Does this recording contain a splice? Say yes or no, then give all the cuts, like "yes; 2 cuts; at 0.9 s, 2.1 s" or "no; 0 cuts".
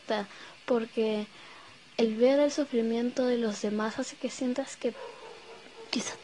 no; 0 cuts